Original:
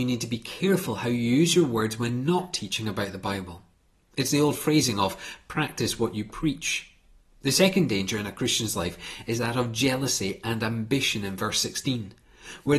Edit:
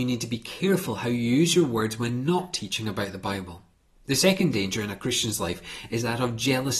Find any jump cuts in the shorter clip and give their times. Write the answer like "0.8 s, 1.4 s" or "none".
3.9 s